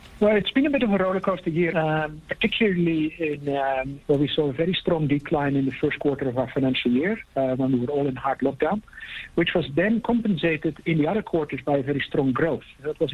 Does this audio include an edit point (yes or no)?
yes